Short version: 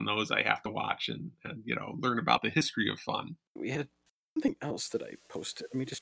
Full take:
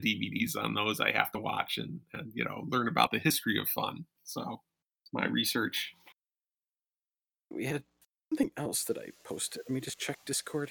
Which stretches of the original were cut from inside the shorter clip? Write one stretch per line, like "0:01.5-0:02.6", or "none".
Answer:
0:04.2-0:07.4